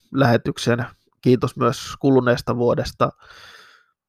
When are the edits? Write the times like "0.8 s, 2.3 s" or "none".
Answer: none